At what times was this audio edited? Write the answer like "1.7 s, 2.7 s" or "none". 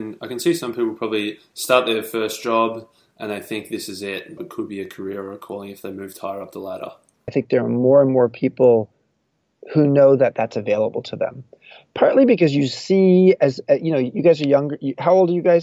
4.4 s, 7.3 s